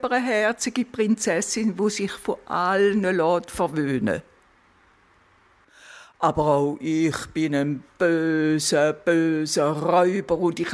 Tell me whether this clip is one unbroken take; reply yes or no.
yes